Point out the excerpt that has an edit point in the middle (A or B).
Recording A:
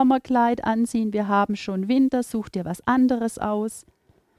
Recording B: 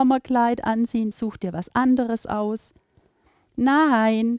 B